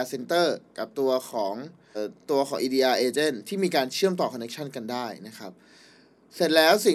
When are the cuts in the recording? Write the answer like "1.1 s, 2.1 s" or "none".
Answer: 1.9 s